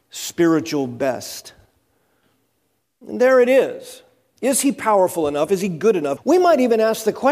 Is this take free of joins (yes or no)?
no